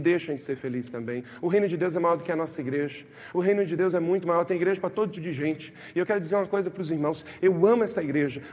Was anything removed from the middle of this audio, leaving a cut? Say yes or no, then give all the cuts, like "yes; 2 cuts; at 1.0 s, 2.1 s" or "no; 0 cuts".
yes; 2 cuts; at 5.1 s, 7.4 s